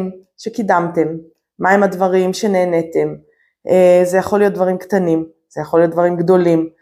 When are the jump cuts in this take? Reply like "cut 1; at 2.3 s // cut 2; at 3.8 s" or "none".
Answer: none